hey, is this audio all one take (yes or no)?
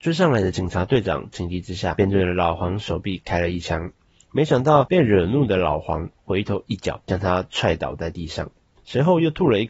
yes